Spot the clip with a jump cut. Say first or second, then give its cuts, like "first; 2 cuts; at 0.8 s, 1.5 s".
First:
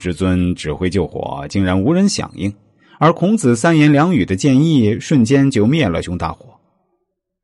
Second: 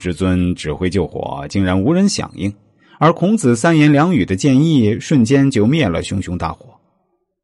first; 1 cut; at 6.0 s